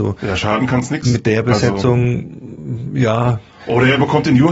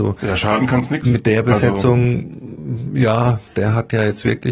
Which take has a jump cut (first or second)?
second